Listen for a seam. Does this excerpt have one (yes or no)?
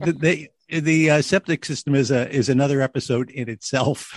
no